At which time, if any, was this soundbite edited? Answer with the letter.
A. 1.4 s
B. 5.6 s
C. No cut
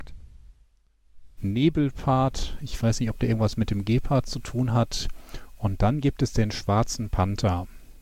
A